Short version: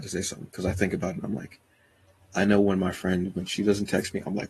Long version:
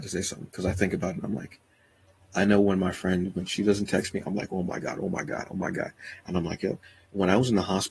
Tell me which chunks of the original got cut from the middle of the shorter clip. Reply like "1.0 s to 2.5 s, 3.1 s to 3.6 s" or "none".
none